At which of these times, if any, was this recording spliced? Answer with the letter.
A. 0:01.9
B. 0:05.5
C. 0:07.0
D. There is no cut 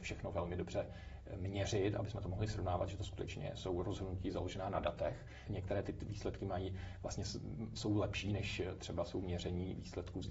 B